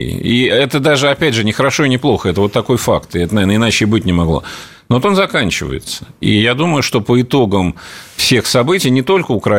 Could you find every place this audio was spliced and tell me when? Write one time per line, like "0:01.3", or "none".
none